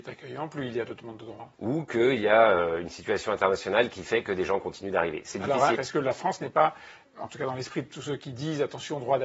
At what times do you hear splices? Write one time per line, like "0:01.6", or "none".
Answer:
0:01.5
0:05.8
0:07.1

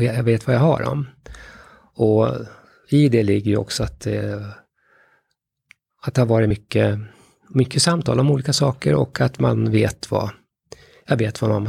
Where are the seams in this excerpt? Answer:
none

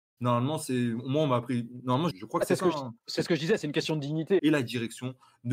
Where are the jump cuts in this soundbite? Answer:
0:02.1
0:04.4

